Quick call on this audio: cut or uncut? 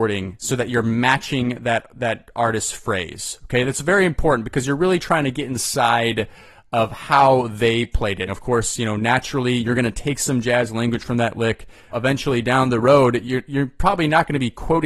cut